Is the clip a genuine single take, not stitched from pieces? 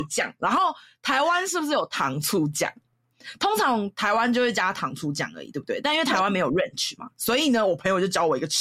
yes; 0 cuts

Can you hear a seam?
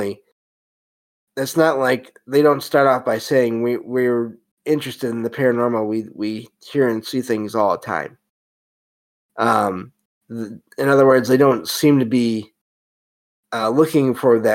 no; 0 cuts

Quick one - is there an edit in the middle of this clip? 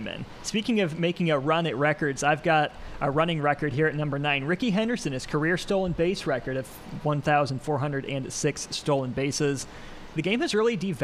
no; 0 cuts

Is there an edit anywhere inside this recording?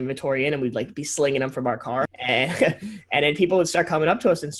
yes; 1 cut; at 2.1 s

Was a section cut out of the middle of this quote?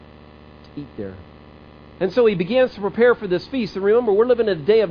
yes; 1 cut; at 2.0 s

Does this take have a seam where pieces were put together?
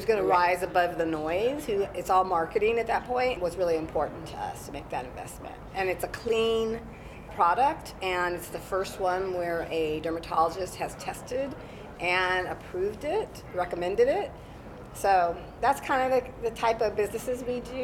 yes; 1 cut; at 3.4 s

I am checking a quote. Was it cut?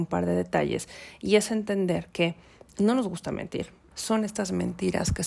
yes; 1 cut; at 3.9 s

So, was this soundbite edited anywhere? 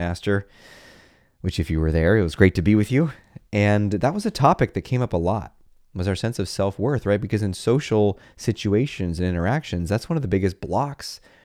no; 0 cuts

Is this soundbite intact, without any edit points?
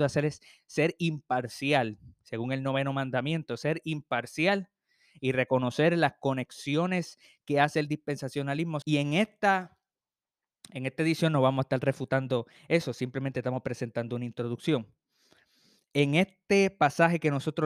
no; 1 cut; at 8.8 s

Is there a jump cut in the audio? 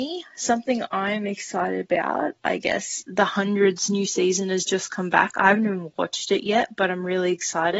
no; 0 cuts

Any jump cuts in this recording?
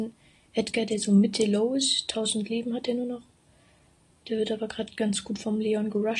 no; 0 cuts

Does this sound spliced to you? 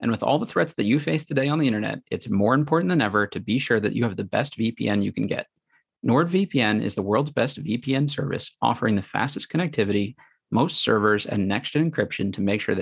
no; 0 cuts

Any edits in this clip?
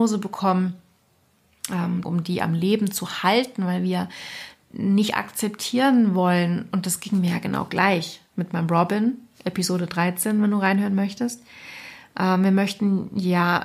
yes; 1 cut; at 2.0 s

